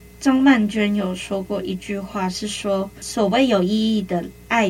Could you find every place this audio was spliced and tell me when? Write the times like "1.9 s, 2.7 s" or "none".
none